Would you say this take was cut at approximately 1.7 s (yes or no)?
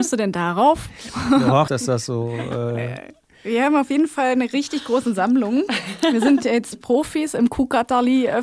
yes